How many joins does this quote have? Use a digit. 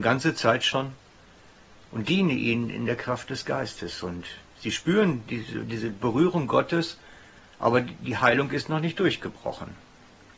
0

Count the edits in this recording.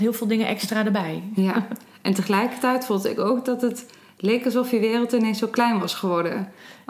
0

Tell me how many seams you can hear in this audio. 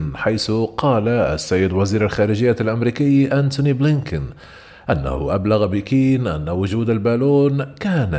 0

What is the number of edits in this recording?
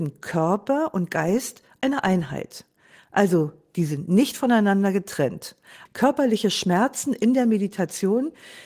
1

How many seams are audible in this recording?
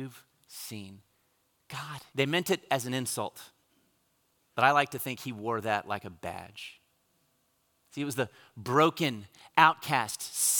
1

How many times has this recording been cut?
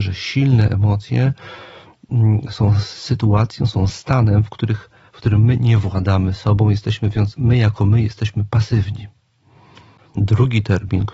1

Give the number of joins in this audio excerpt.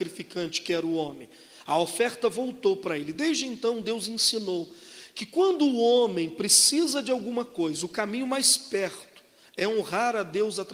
0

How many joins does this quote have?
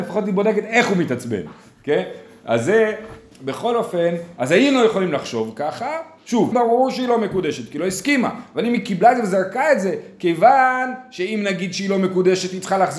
1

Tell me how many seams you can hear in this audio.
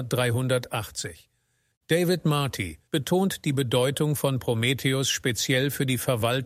2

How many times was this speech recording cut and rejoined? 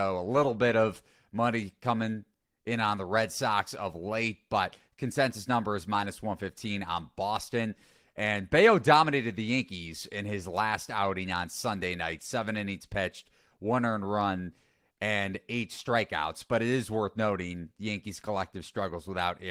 0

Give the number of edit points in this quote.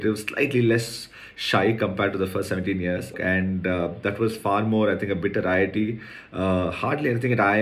1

